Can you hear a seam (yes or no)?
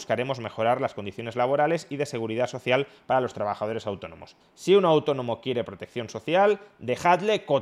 yes